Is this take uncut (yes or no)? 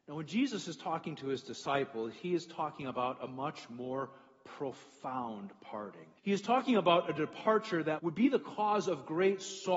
no